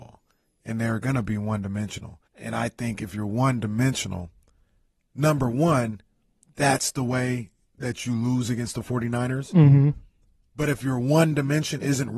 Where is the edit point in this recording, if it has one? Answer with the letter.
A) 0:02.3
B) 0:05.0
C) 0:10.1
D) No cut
A